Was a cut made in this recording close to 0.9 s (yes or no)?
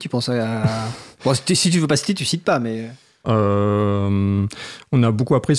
no